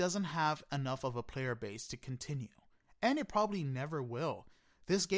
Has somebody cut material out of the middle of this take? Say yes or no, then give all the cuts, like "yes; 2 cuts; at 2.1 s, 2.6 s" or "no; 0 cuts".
no; 0 cuts